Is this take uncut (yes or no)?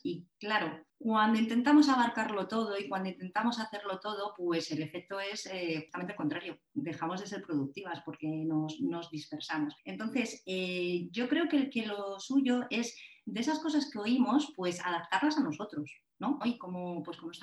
no